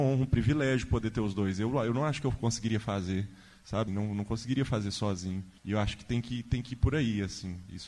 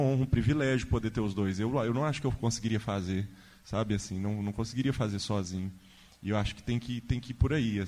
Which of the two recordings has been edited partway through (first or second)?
first